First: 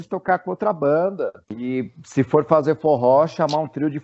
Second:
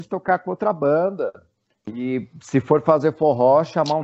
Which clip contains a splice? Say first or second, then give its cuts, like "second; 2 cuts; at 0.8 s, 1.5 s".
first; 1 cut; at 1.4 s